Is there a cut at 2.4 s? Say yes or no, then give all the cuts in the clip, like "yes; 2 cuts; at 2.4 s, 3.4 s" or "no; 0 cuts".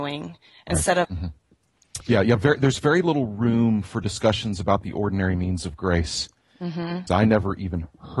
no; 2 cuts; at 1.0 s, 7.1 s